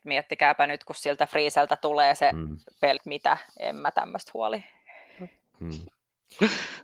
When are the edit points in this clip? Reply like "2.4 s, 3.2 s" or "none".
3.0 s, 5.5 s